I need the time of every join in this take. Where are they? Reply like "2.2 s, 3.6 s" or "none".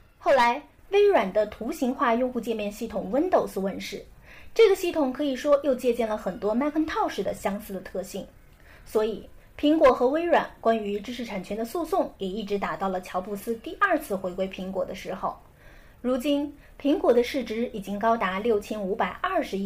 none